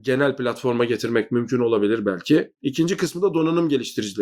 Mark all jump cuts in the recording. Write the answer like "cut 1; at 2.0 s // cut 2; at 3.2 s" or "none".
cut 1; at 2.5 s